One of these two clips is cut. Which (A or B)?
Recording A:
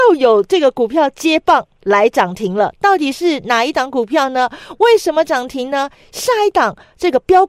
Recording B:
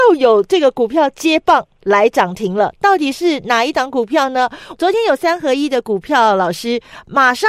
B